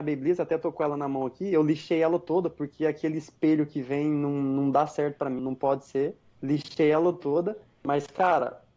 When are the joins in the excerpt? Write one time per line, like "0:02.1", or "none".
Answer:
0:05.4